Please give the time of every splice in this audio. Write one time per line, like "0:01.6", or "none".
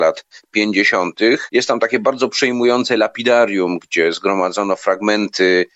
none